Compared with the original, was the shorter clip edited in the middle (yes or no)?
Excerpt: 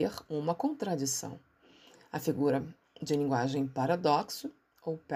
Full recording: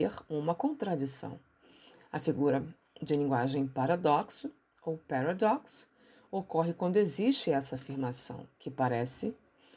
no